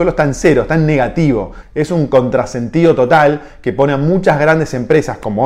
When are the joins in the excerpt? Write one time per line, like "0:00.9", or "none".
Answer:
0:01.6